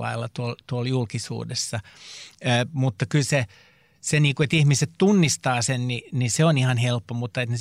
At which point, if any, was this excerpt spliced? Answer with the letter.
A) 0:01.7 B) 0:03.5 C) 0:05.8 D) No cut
D